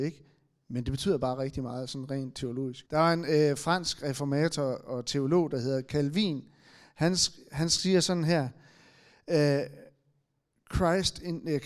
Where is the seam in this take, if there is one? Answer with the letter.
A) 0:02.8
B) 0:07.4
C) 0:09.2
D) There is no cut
A